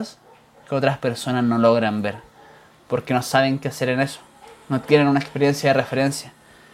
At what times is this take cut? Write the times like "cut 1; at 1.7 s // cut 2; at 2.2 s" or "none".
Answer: none